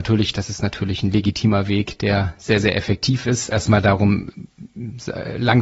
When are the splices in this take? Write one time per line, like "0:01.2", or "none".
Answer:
0:03.5